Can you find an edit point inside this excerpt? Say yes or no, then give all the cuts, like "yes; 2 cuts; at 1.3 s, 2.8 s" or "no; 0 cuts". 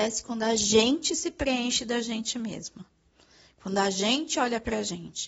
no; 0 cuts